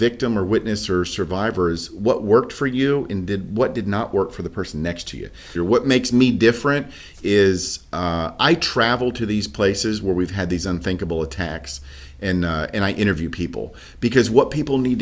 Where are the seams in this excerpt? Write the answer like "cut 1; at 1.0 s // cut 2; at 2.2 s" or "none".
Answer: cut 1; at 5.6 s